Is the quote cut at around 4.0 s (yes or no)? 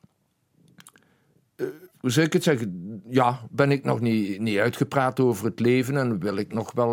no